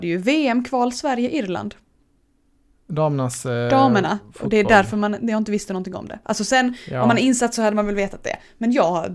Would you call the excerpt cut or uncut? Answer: uncut